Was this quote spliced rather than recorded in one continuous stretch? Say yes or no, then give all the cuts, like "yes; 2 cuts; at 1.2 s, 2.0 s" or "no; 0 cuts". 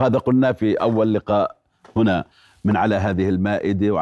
no; 0 cuts